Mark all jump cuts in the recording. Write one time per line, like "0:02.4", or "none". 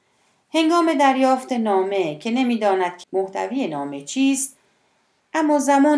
0:03.0